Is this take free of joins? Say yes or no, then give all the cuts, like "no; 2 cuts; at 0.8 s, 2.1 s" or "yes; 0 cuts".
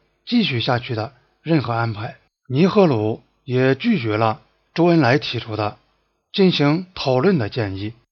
yes; 0 cuts